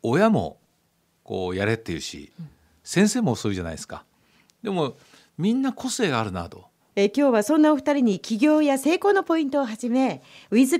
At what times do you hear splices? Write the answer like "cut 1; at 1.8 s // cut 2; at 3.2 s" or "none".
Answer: cut 1; at 6.8 s